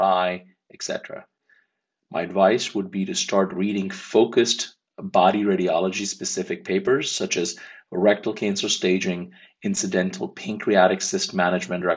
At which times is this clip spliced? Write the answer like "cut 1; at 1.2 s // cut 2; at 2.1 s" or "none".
none

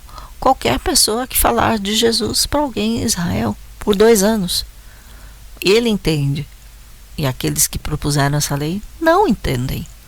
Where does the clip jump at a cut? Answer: cut 1; at 5.6 s

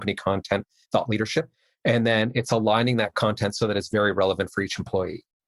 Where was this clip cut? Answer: none

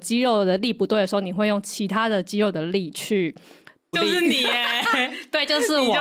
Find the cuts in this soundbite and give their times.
cut 1; at 3.9 s

